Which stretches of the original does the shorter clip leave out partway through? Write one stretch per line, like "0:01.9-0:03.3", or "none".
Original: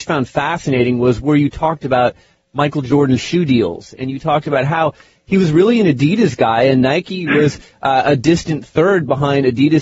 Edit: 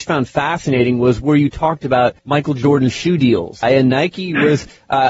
0:02.2-0:02.5
0:03.9-0:06.6